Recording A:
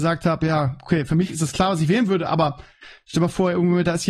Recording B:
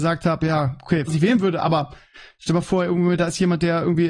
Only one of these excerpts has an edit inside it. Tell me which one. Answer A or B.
B